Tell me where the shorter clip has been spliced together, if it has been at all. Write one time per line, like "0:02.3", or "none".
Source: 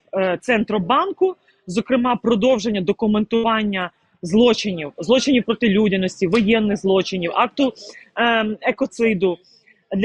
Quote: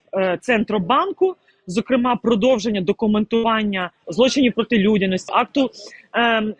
0:04.0
0:05.3